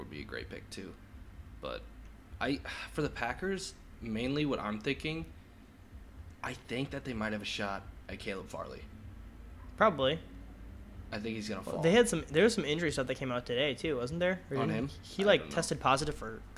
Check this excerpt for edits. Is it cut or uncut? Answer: uncut